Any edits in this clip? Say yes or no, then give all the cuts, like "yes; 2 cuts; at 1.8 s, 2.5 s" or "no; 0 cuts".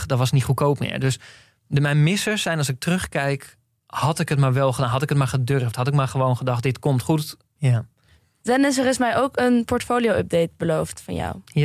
yes; 1 cut; at 7.6 s